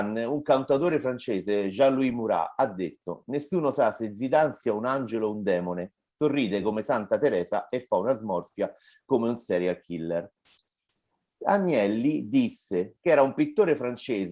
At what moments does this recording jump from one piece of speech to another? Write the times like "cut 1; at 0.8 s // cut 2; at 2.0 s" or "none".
cut 1; at 12.9 s